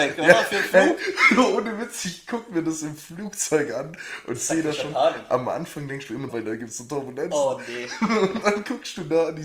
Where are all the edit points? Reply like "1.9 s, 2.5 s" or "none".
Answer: 6.3 s